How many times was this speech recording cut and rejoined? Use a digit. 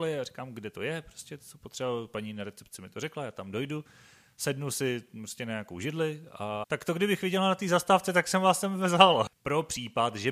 2